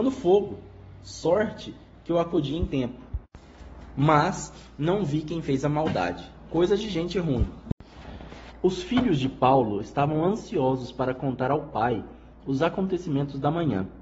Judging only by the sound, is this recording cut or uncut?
uncut